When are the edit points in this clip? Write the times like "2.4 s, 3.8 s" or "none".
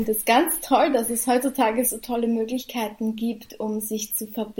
none